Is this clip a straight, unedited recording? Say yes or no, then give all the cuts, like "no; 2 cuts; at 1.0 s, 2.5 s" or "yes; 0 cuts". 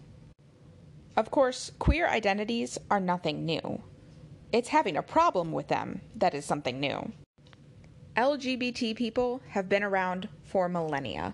yes; 0 cuts